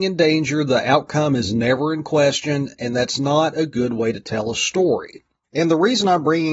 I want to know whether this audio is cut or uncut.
uncut